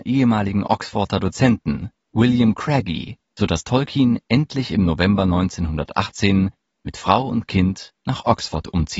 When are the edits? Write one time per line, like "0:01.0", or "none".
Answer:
0:03.3